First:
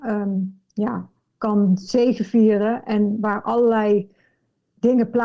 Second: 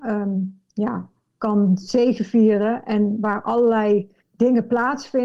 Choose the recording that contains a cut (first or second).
second